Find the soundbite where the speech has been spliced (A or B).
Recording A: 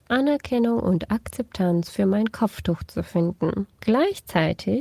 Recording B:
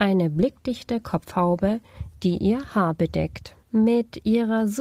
B